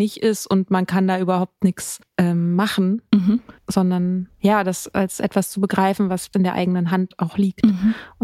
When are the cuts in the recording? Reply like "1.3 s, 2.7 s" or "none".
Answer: none